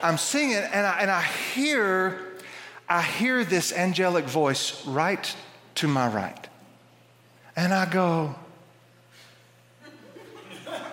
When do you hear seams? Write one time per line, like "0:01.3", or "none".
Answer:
0:07.4

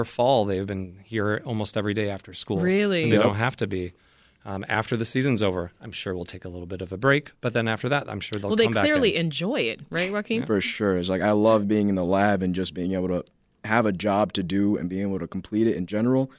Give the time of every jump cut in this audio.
none

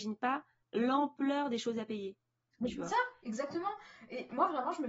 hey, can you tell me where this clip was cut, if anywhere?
none

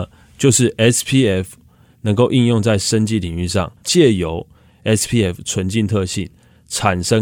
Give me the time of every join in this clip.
0:03.8

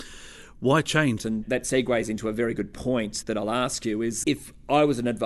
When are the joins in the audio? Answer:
0:01.2
0:03.2
0:04.2

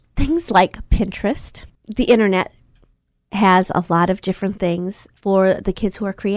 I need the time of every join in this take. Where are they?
0:01.7
0:05.2

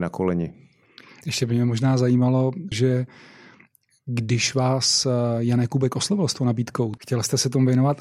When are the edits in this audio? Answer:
0:02.7
0:07.0

